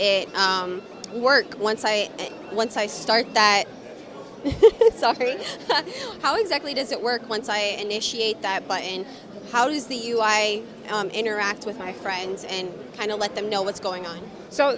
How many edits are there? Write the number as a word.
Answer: zero